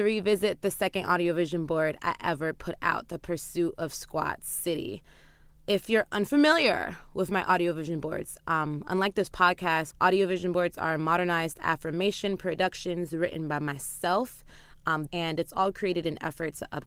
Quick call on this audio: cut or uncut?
cut